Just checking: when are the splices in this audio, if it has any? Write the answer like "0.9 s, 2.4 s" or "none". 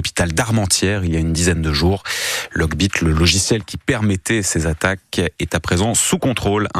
none